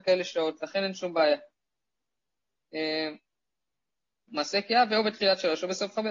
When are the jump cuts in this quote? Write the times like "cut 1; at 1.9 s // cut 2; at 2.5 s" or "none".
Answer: cut 1; at 4.3 s